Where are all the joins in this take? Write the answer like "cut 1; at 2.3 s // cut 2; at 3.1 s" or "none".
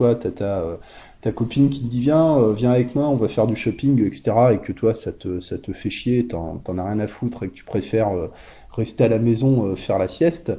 none